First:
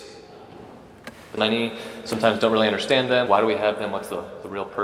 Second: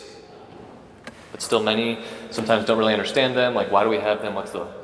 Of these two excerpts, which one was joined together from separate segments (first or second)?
first